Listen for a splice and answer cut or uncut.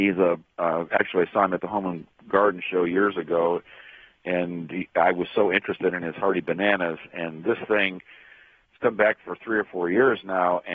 uncut